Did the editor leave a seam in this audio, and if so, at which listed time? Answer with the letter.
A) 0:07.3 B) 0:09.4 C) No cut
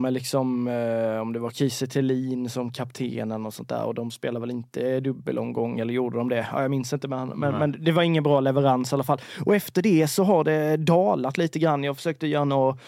C